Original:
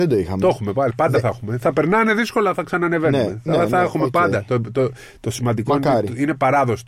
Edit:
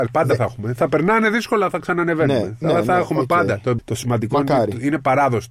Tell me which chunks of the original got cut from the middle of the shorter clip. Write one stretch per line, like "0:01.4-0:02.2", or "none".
0:04.6-0:05.1